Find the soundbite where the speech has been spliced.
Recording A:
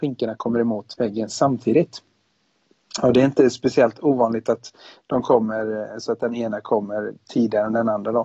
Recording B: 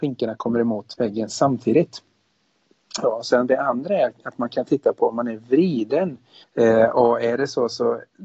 B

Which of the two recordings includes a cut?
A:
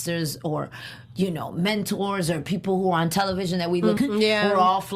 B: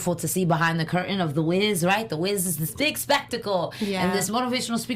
A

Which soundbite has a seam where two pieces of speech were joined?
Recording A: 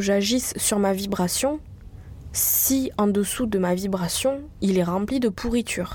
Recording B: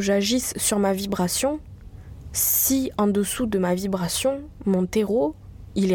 A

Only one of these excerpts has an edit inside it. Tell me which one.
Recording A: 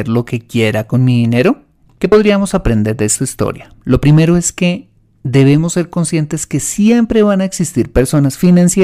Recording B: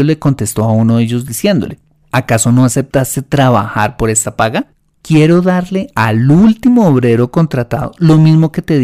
A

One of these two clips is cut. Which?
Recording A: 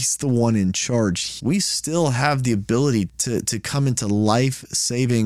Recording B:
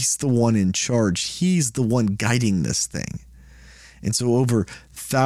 A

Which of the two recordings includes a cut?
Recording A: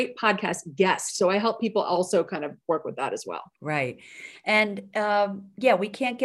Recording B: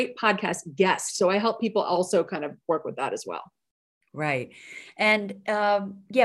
A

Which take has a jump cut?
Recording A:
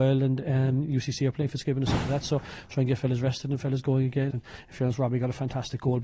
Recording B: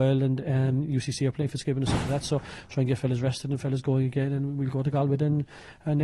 A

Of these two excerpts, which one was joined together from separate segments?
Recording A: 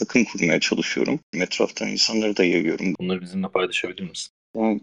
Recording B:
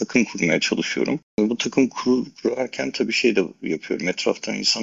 A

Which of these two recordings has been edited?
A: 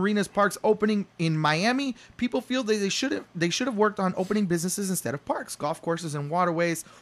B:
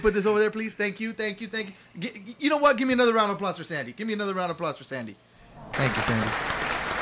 B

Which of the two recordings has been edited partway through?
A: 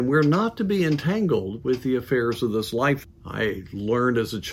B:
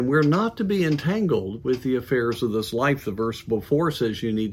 A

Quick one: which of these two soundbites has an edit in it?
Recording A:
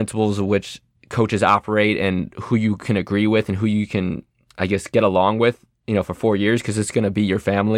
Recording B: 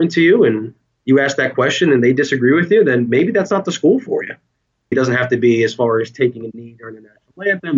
B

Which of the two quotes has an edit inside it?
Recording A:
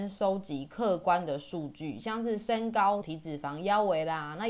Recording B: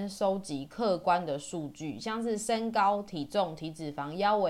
A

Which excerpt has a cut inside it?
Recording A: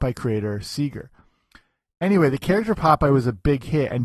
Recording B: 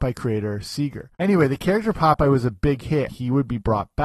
B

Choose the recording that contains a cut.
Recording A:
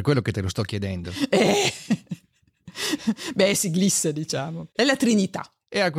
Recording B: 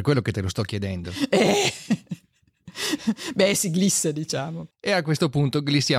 B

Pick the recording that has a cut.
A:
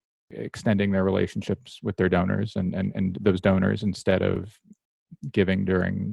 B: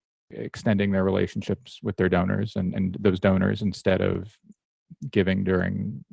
B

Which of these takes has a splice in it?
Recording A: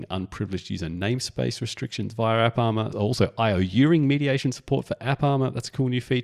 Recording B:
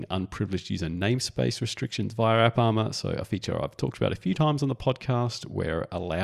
A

